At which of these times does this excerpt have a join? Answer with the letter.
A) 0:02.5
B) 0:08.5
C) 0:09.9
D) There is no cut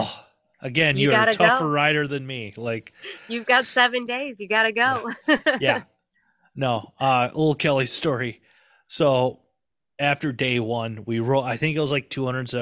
D